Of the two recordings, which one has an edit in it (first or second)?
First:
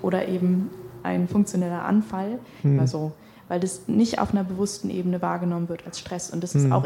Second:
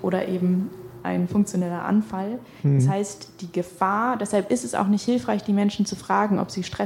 first